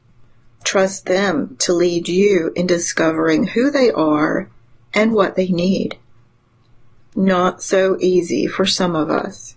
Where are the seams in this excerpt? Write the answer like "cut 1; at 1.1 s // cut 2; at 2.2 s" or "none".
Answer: none